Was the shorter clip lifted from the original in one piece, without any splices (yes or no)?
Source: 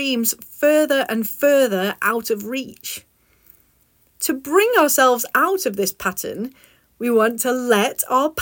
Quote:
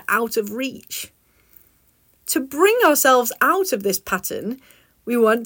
yes